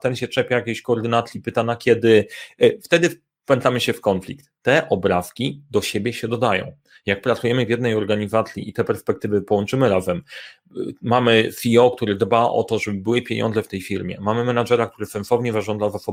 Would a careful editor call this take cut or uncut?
uncut